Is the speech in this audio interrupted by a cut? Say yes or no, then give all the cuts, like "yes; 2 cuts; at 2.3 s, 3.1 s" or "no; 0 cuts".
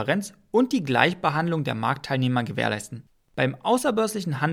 yes; 1 cut; at 3.3 s